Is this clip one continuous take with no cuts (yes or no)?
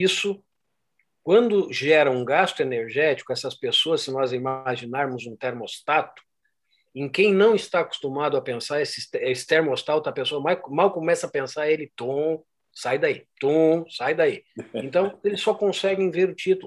yes